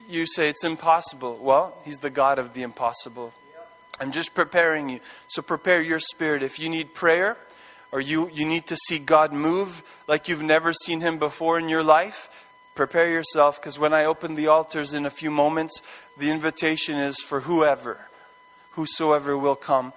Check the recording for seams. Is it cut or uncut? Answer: uncut